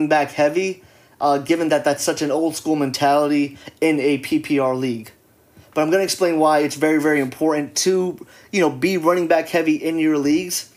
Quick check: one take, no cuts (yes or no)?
yes